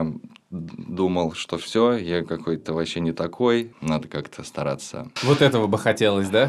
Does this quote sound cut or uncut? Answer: cut